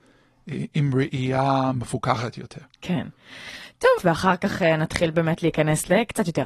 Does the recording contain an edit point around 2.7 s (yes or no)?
no